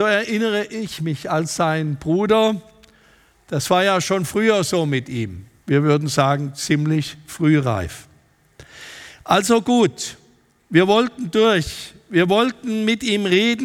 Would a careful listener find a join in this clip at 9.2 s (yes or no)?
no